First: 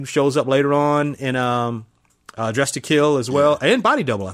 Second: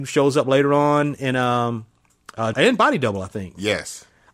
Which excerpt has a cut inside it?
second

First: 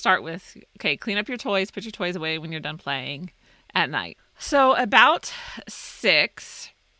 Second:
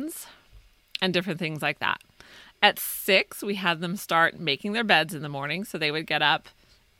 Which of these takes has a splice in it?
first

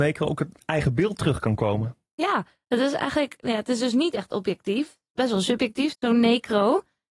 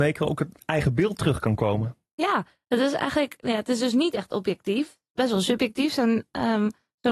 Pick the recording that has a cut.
first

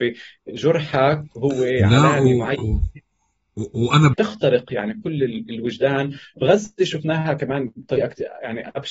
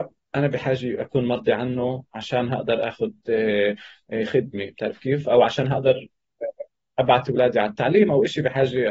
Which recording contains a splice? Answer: first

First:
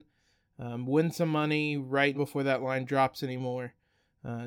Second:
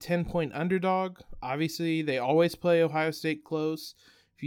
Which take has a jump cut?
first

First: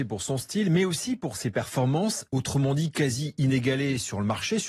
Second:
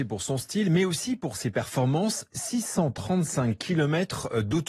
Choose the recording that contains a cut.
first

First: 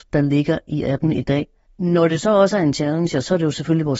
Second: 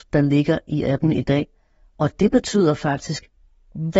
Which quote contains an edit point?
first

